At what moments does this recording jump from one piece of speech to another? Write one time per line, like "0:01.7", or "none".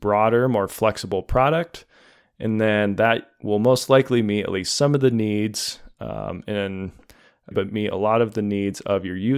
0:07.5